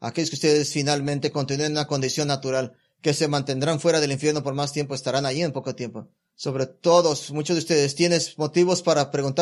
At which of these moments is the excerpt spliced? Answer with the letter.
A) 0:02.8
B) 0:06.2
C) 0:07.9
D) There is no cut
B